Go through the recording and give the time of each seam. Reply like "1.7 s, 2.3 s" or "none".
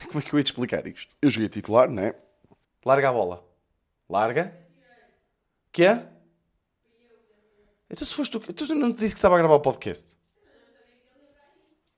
1.2 s, 2.6 s